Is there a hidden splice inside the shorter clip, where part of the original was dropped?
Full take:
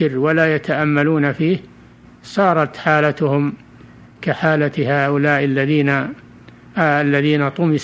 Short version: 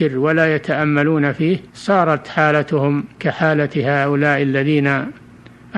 yes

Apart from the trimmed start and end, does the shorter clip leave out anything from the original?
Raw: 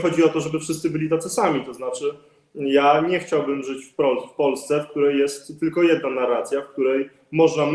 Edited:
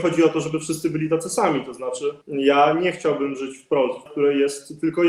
yes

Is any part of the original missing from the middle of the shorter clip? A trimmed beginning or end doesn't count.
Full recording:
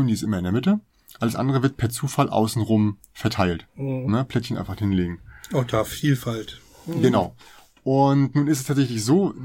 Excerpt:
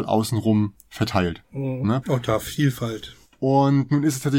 yes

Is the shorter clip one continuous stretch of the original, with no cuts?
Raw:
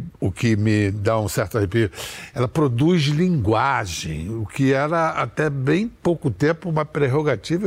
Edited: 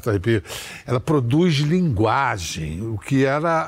yes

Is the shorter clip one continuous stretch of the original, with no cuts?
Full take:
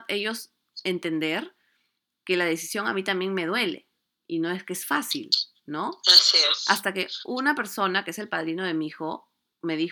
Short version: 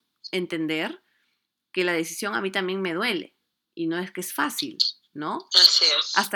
yes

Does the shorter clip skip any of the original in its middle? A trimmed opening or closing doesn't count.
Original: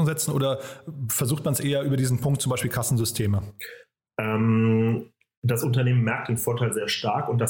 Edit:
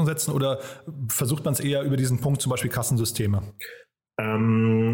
no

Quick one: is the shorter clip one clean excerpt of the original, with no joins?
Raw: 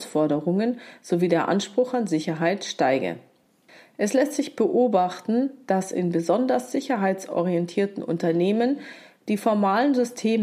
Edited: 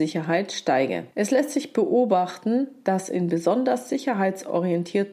no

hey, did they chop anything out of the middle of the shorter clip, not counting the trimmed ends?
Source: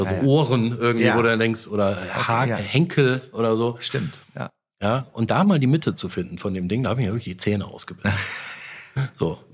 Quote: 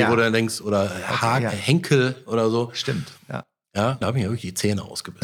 yes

